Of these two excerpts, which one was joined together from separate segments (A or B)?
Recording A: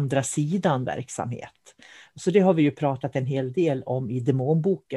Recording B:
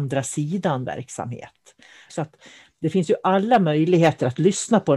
B